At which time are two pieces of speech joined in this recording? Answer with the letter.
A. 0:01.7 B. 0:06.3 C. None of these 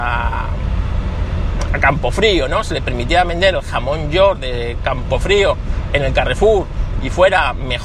A